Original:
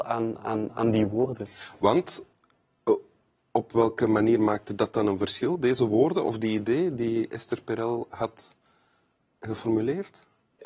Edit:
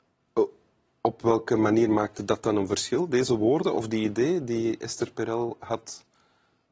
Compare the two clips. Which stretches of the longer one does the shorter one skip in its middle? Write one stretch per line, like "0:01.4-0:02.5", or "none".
none